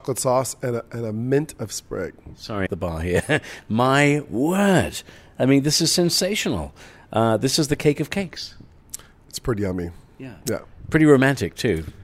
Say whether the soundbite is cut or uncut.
cut